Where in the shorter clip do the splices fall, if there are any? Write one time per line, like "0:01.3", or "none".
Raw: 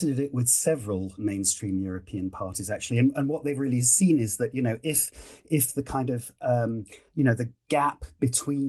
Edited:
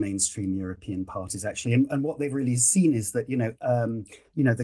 0:03.5